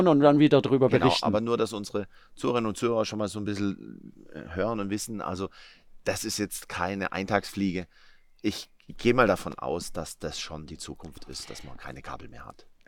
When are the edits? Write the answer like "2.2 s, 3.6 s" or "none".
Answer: none